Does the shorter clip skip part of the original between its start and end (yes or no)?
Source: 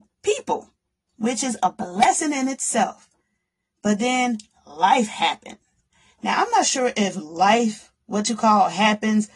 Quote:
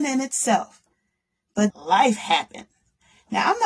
yes